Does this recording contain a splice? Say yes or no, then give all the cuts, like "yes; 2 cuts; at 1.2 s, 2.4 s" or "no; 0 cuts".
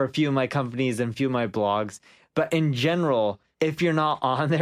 no; 0 cuts